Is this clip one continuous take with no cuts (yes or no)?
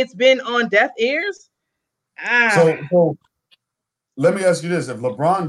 yes